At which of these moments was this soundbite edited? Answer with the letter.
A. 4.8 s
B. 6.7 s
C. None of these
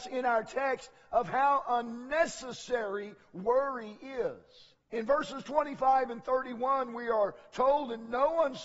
A